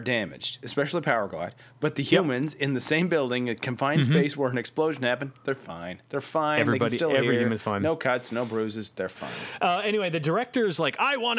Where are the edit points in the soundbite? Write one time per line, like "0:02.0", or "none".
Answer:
none